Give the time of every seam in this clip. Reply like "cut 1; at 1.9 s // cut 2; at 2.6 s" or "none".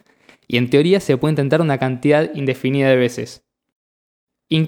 none